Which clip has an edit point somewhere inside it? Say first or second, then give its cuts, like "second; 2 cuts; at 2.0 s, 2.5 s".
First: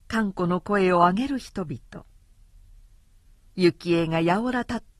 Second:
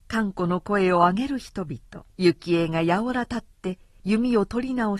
second; 1 cut; at 2.1 s